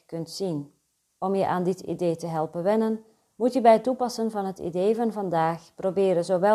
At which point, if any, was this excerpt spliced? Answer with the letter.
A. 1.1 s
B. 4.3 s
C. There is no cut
A